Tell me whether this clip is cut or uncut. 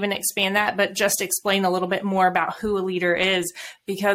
uncut